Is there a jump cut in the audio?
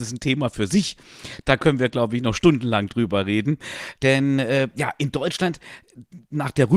yes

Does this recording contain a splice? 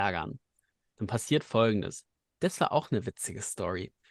yes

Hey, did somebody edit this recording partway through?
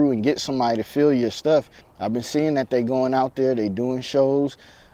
yes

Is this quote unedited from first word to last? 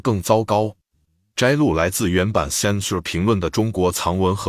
yes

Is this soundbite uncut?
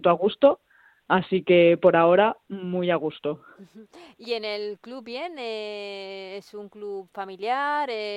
yes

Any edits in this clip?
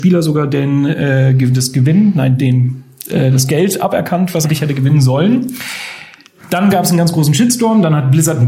yes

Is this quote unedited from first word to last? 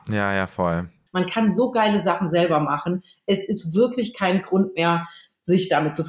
no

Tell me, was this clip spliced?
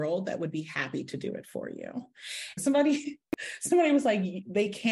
no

